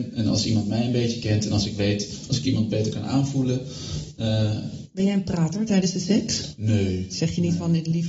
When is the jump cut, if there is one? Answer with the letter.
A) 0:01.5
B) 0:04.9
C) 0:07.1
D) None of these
D